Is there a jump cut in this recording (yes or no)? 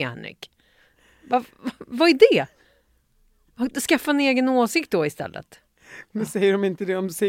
no